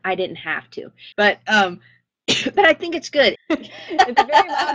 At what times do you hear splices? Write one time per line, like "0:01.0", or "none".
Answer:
0:01.1
0:03.4